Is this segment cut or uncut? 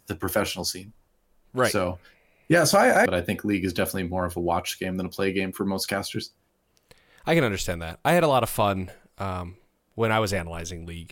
cut